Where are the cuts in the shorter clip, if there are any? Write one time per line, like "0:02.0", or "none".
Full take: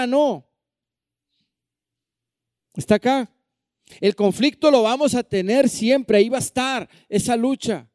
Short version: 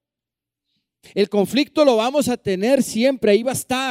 0:01.0